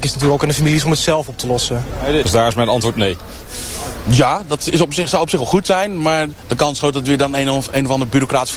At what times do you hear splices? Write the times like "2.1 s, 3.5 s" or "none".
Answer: 2.2 s